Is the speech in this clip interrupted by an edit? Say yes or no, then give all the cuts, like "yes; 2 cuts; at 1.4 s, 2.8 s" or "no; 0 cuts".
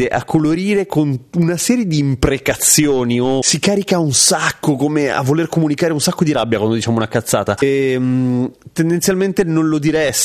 yes; 1 cut; at 7.6 s